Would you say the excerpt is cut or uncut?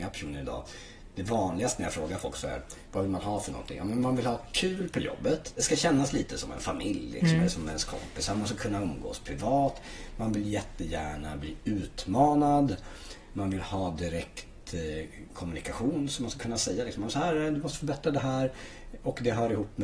uncut